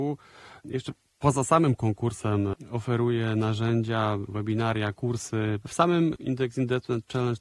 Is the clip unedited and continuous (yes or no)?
no